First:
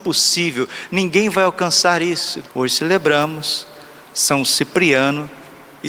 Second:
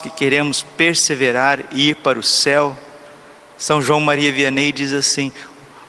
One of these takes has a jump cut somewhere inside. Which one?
first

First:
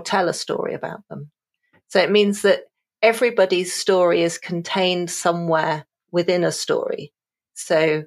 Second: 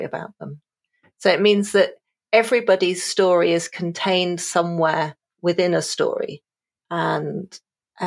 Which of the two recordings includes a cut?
second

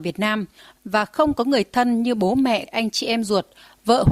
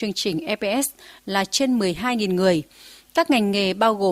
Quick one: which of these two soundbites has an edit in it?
first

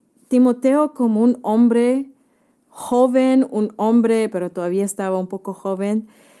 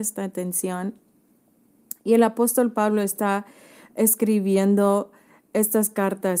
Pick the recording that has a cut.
first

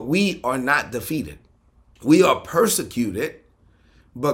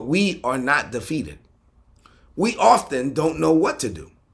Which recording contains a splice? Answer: first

